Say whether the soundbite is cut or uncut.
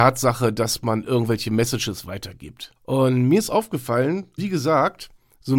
cut